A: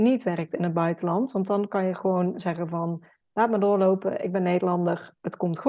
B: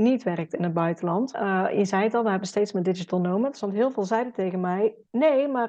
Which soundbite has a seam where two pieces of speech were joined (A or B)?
B